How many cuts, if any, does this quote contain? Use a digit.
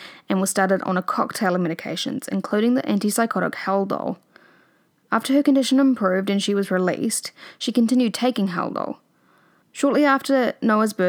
1